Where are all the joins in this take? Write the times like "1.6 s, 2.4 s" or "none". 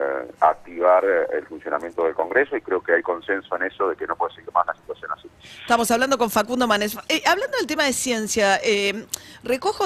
none